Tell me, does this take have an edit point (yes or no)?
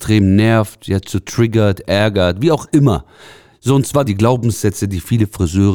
yes